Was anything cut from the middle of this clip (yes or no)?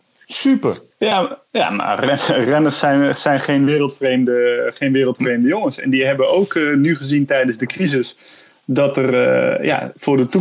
yes